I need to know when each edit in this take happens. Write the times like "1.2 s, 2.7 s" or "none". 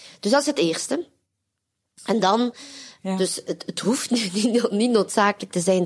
3.0 s

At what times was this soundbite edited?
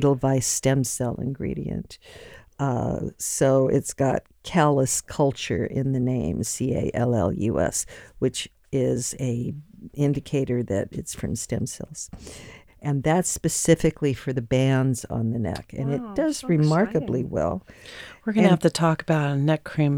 12.7 s

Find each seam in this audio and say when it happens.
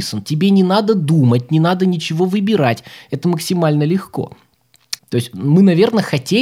5.0 s

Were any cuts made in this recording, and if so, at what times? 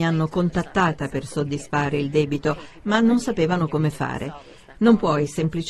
4.7 s

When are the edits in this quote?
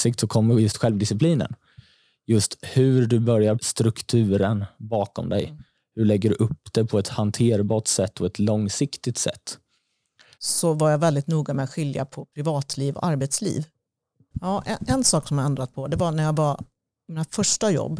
3.6 s, 10.3 s, 14.3 s

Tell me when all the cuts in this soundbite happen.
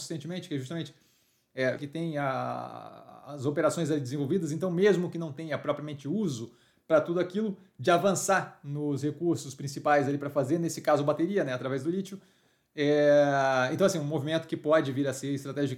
1.8 s

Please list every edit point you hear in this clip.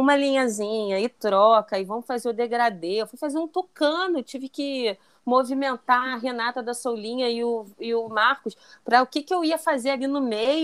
none

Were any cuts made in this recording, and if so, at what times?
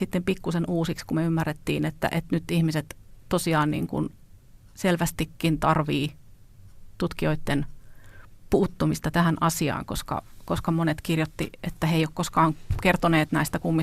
none

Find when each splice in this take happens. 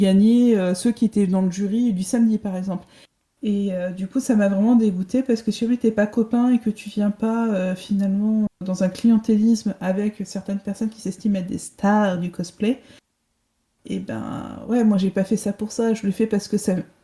3.2 s

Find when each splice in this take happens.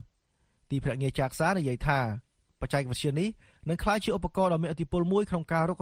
none

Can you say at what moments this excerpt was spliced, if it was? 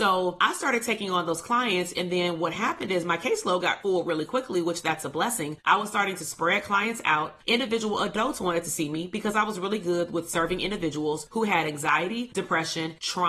5.6 s, 7.4 s

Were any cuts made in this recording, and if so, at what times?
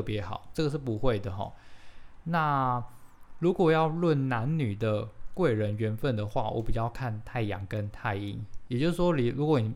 8.7 s

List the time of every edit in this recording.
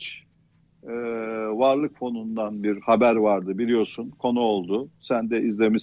none

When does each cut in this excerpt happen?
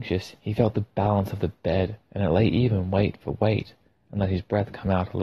none

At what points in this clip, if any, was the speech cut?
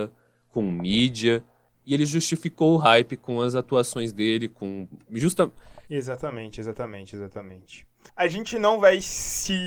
1.7 s, 5.9 s, 8.1 s

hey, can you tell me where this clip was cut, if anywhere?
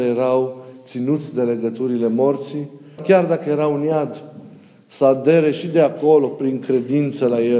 3.0 s

